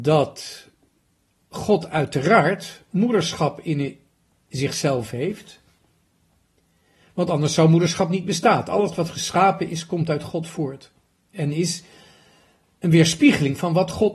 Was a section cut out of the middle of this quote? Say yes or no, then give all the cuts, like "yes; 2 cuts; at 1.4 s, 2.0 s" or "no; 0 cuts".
no; 0 cuts